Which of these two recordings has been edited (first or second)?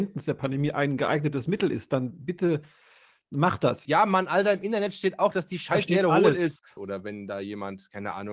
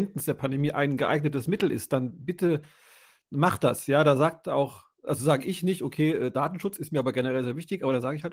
first